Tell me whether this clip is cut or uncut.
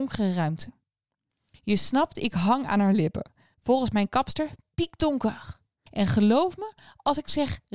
cut